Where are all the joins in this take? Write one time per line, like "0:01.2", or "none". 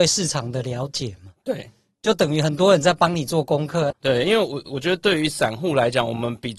0:03.9